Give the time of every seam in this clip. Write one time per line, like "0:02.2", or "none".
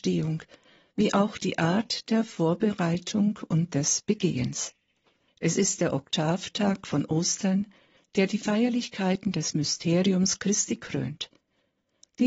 0:05.3